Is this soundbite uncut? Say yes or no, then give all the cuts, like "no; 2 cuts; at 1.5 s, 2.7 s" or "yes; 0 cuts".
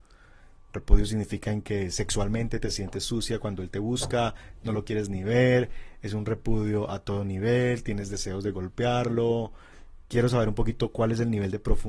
yes; 0 cuts